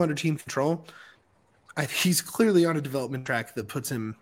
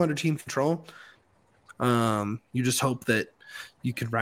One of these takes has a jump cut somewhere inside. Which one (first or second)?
second